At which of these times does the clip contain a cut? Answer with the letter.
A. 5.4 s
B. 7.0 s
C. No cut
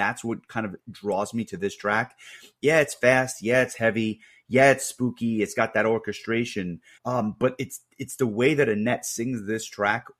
B